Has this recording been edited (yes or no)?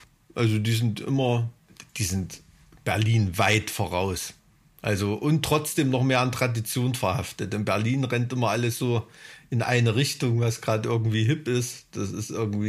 no